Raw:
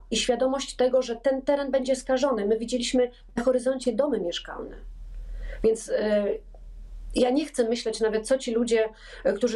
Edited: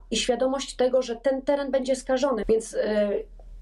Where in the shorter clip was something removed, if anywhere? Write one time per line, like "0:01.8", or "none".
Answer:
0:02.4